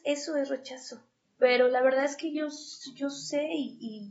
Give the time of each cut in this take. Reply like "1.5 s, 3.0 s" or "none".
1.2 s